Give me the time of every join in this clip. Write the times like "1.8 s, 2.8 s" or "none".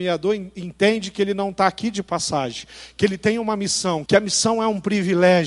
4.1 s